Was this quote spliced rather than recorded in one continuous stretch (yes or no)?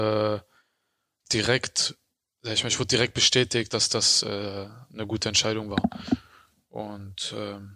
no